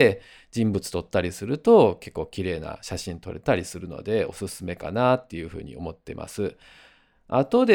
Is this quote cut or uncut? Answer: uncut